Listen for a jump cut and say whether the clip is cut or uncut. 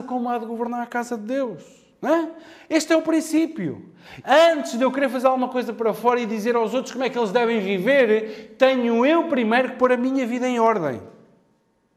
cut